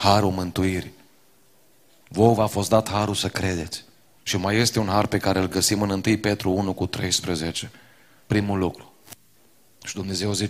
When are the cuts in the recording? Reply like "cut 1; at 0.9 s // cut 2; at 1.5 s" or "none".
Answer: cut 1; at 4.2 s // cut 2; at 8.2 s